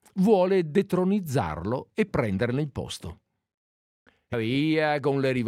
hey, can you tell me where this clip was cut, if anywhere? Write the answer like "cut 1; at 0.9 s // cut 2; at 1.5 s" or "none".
cut 1; at 4.3 s